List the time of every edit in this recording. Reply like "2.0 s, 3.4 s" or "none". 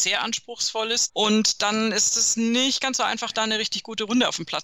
1.1 s